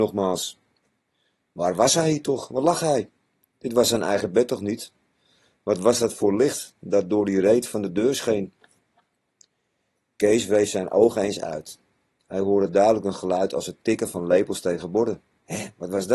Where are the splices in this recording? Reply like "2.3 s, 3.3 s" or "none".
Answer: none

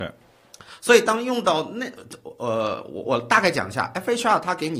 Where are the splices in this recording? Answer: 3.0 s

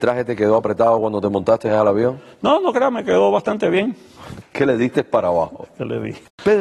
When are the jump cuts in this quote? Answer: 4.4 s

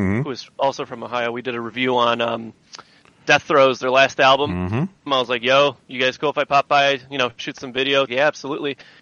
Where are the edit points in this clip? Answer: 5.1 s, 8.1 s

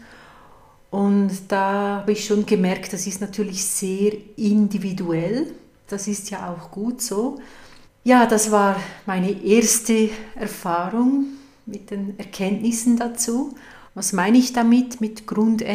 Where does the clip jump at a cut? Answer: 5.9 s, 7.8 s, 13.9 s

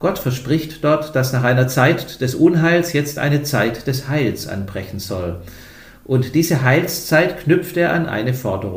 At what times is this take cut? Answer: none

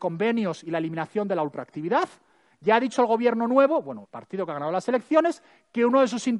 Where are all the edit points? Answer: 4.0 s

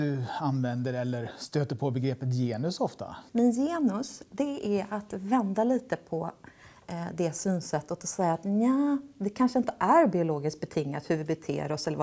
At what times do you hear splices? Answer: 3.3 s

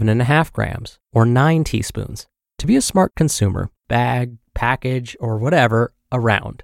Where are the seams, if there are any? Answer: 2.5 s, 3.8 s

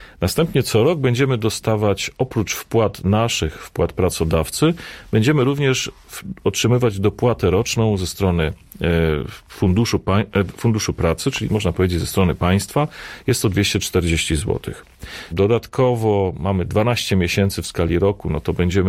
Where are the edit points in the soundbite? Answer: 15.3 s

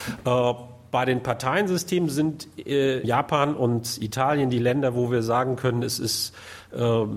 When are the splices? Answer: 3.0 s

